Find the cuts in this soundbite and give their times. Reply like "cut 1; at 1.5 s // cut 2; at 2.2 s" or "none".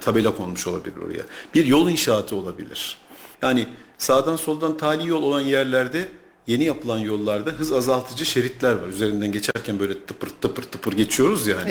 cut 1; at 3.3 s